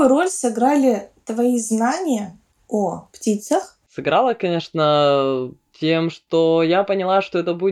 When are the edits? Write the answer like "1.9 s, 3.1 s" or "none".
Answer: none